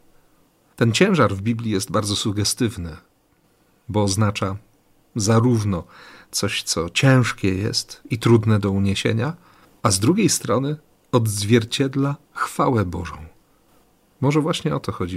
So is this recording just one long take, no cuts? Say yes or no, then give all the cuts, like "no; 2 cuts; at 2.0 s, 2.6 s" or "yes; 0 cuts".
yes; 0 cuts